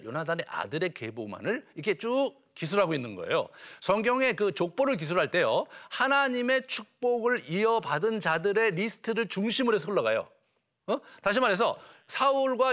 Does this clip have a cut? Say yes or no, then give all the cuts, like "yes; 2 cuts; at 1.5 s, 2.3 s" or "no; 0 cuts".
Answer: no; 0 cuts